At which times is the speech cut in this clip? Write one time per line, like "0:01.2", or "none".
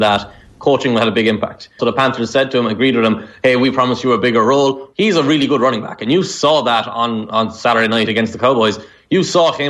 0:01.8
0:04.9